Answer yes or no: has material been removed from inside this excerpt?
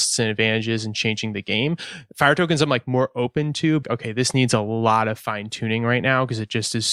yes